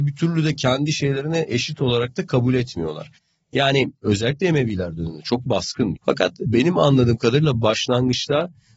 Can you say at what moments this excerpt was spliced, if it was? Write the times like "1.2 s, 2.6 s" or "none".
6.0 s